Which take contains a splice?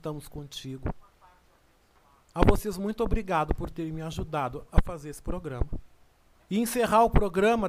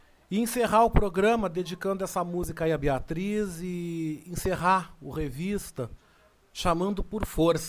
first; 1 cut; at 6.4 s

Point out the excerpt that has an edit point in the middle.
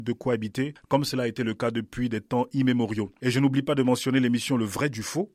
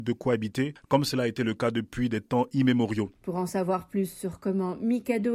second; 1 cut; at 3.2 s

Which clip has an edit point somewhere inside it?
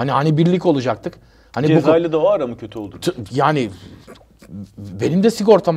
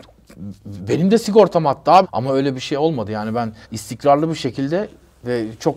second; 2 cuts; at 2.0 s, 3.6 s

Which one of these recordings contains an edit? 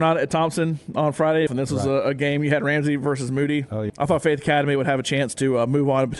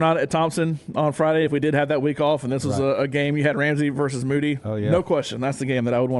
first; 2 cuts; at 1.5 s, 3.9 s

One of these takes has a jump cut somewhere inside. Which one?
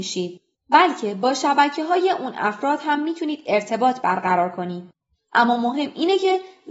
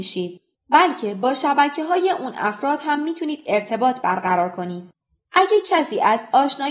first; 1 cut; at 5.1 s

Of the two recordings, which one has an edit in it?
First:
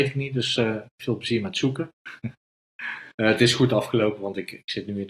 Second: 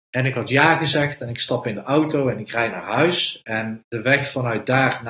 first; 1 cut; at 3.1 s

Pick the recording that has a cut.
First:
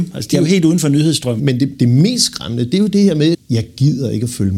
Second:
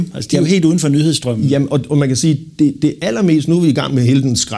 first; 2 cuts; at 1.4 s, 3.3 s

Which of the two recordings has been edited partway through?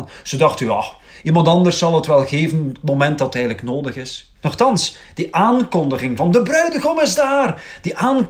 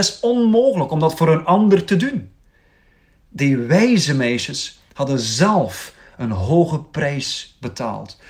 first; 1 cut; at 4.4 s

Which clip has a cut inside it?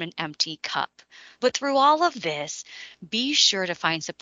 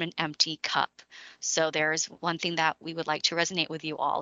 first; 1 cut; at 1.4 s

